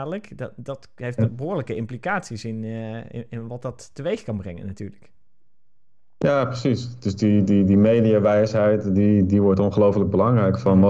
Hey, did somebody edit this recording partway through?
no; 0 cuts

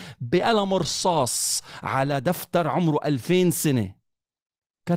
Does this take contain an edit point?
no; 0 cuts

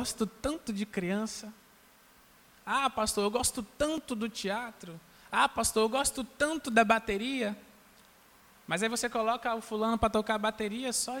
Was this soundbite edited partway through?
no; 0 cuts

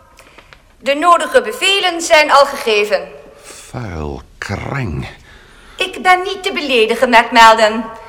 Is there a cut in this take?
no; 0 cuts

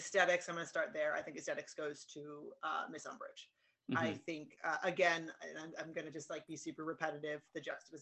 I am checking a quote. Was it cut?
no; 0 cuts

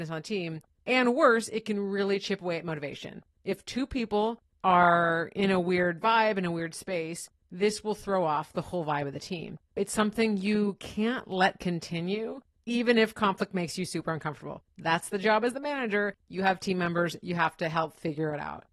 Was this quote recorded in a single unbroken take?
yes; 0 cuts

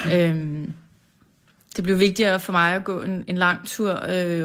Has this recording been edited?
no; 0 cuts

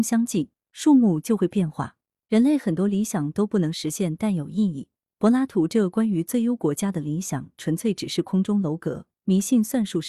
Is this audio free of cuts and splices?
no; 1 cut; at 2.2 s

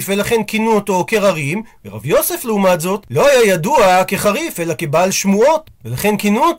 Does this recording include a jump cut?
no; 0 cuts

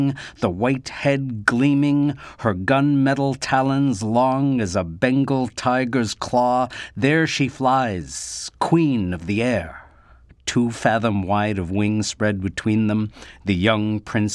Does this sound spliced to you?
yes; 1 cut; at 10.3 s

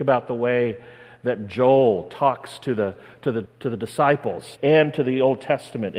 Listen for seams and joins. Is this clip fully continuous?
no; 2 cuts; at 3.5 s, 4.6 s

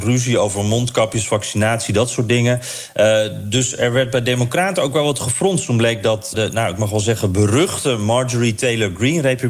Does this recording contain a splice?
yes; 1 cut; at 6.3 s

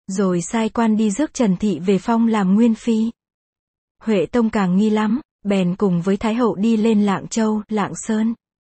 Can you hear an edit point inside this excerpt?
yes; 1 cut; at 3.8 s

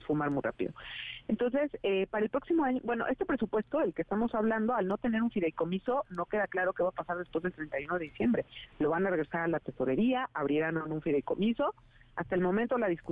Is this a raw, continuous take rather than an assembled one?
yes; 0 cuts

